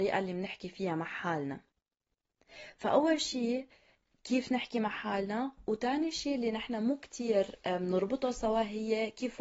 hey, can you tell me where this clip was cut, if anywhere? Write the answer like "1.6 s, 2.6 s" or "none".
none

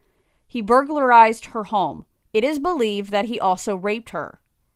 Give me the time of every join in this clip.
2.2 s

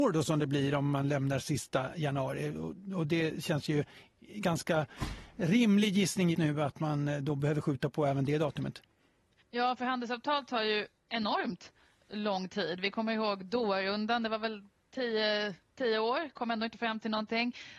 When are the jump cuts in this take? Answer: 6.3 s

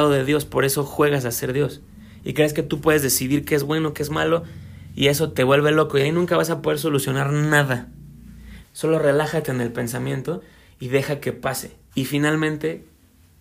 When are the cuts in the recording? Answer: 8.6 s, 11.9 s

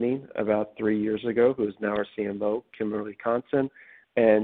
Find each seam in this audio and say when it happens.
none

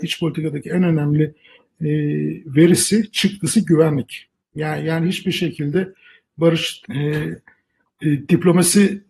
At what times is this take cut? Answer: 4.4 s, 6.8 s

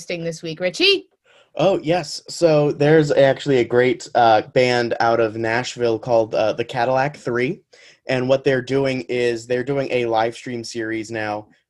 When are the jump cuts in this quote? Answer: 4.4 s

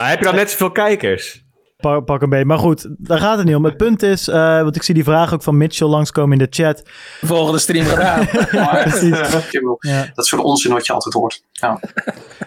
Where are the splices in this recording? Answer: 1.8 s, 7.2 s, 9.5 s

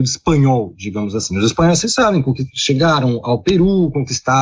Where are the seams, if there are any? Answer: none

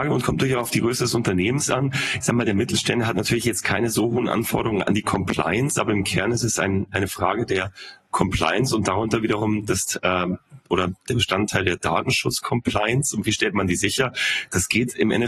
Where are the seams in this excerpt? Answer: none

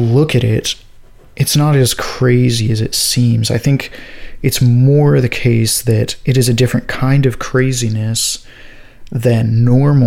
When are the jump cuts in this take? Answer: none

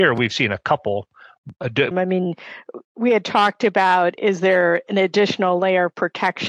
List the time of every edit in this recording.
1.9 s

